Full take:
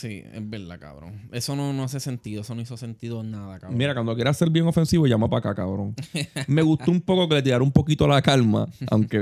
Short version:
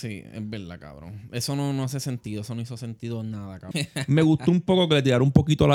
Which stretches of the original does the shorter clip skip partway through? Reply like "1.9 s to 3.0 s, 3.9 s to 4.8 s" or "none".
3.7 s to 6.1 s